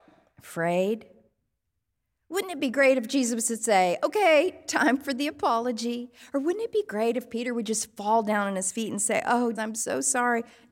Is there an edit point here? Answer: yes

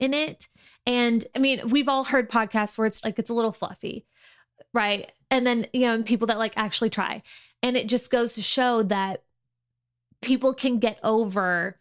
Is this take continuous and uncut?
no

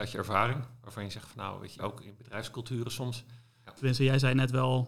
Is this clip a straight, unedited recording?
no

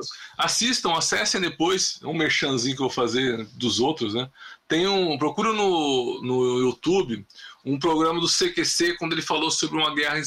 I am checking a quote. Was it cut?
no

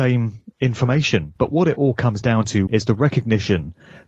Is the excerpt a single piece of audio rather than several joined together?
no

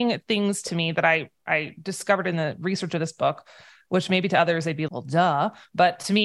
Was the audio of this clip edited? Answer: yes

